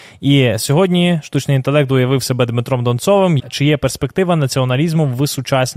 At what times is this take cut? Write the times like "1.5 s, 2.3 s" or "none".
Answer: 3.4 s